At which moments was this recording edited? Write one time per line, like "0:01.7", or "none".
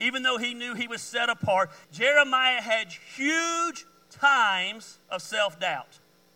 0:01.8
0:05.0